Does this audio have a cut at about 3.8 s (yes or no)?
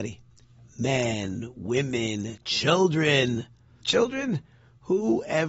yes